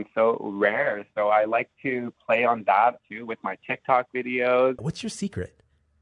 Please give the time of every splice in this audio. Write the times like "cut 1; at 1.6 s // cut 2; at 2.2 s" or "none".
cut 1; at 3.0 s // cut 2; at 4.8 s